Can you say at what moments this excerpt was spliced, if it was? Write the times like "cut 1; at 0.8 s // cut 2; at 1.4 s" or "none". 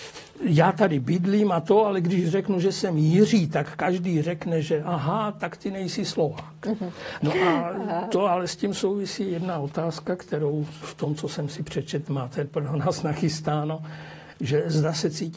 cut 1; at 7.2 s